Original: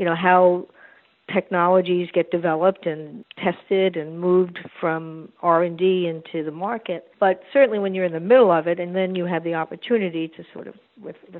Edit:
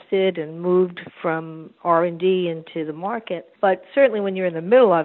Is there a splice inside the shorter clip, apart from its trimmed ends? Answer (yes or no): no